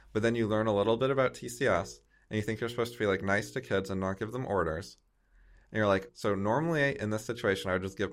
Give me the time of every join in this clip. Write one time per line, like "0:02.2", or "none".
0:06.1